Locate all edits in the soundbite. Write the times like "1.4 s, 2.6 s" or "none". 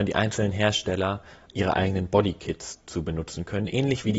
none